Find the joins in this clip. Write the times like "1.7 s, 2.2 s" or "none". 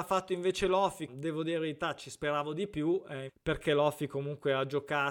1.1 s, 3.3 s